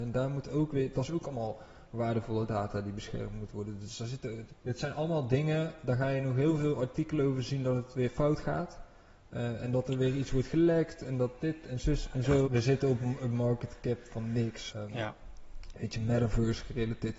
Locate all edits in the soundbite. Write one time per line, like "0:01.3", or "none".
0:04.5
0:12.5
0:14.7